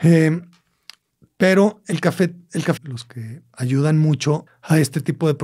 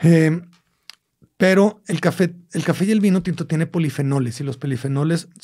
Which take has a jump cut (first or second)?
first